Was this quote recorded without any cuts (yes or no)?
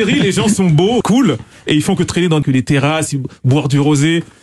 no